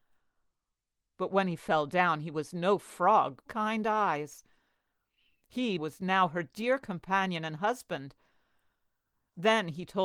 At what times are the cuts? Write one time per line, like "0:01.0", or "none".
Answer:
0:03.5
0:05.8